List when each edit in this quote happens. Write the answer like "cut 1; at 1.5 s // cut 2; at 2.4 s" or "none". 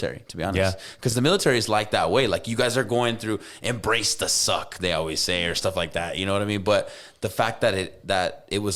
none